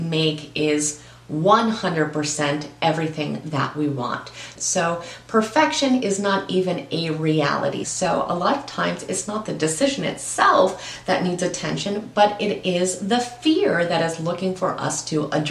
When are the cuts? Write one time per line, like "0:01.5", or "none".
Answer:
0:04.6
0:07.8